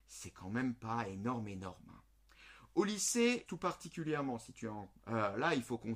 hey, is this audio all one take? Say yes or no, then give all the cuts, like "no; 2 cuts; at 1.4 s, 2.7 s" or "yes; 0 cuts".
no; 2 cuts; at 3.5 s, 5.0 s